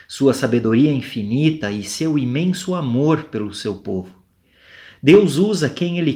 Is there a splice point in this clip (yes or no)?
no